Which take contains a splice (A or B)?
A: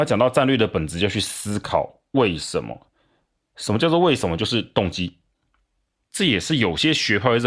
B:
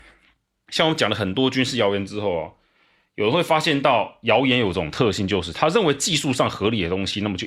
A